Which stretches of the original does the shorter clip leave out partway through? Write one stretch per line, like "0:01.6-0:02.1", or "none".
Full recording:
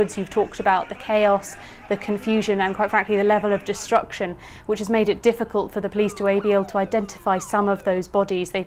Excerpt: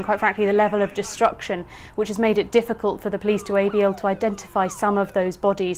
none